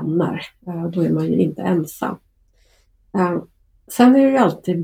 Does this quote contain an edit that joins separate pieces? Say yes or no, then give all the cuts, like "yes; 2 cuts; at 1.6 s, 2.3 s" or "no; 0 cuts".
no; 0 cuts